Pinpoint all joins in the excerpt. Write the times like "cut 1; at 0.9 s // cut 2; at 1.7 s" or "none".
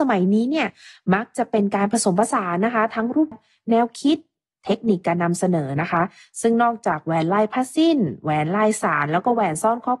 cut 1; at 3.3 s